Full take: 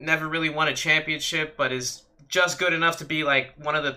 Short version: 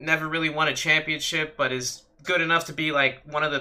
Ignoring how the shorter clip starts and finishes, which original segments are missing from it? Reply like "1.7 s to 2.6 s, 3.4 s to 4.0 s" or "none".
2.2 s to 2.6 s